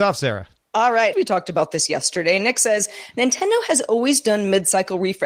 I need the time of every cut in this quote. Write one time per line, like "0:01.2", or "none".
0:01.1

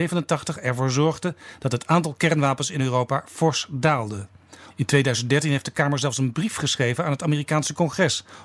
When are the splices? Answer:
0:04.7

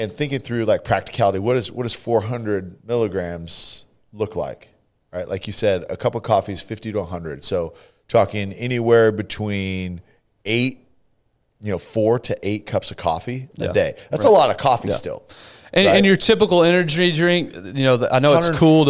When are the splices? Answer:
none

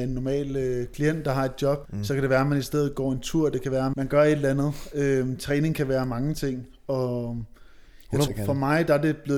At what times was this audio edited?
0:01.9
0:03.9
0:08.3

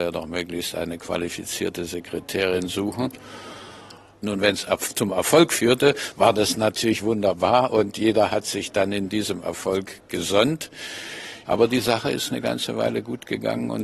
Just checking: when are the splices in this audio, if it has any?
0:04.2
0:11.4

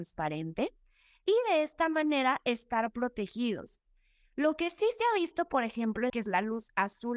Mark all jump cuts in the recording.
0:06.1

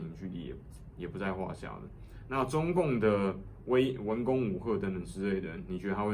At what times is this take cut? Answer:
none

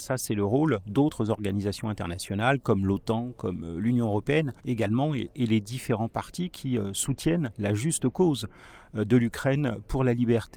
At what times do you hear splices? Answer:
0:04.6

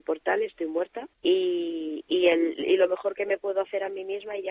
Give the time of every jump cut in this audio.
0:01.1

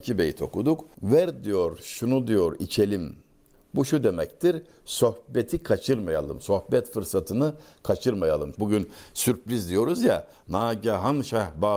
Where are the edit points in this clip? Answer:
0:08.6

